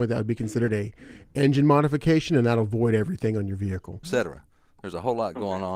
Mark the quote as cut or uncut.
cut